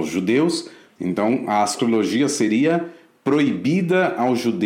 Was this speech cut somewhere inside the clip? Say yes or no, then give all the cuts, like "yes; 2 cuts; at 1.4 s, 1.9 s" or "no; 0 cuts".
yes; 1 cut; at 1.0 s